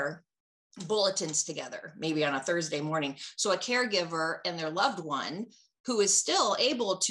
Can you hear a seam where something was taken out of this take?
no; 0 cuts

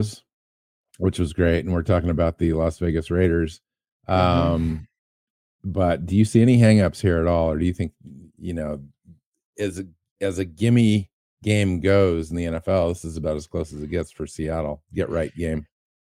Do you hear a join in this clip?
no; 0 cuts

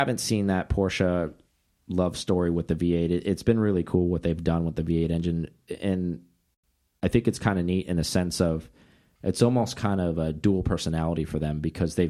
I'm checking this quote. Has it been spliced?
no; 0 cuts

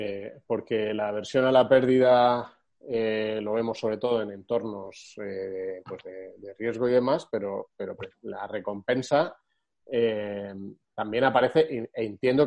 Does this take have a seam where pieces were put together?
no; 0 cuts

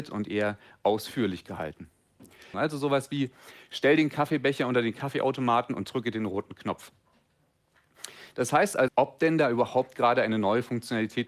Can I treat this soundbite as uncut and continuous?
no; 2 cuts; at 2.5 s, 8.9 s

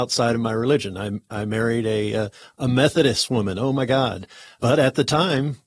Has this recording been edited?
no; 0 cuts

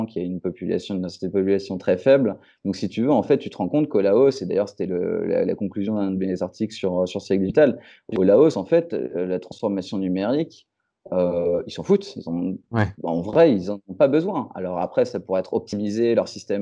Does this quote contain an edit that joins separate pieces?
no; 0 cuts

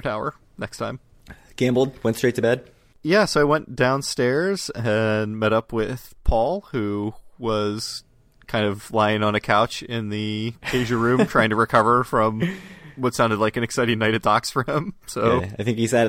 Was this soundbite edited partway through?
no; 0 cuts

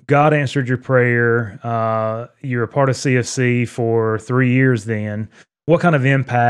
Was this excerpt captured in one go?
yes; 0 cuts

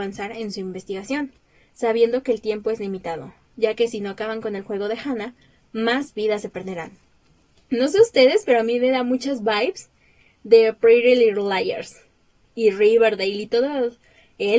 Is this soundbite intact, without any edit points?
yes; 0 cuts

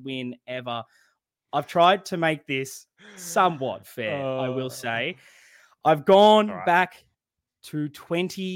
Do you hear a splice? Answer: no; 0 cuts

